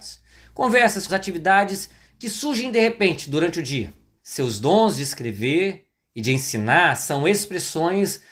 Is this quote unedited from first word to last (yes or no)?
no